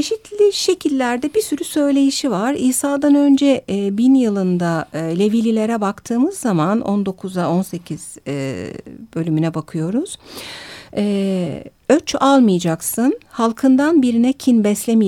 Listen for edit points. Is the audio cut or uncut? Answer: uncut